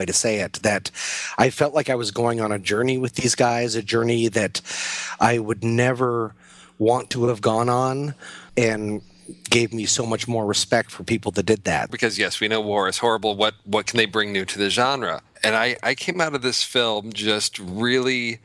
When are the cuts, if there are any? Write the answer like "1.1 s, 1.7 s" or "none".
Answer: 8.5 s, 11.9 s, 15.4 s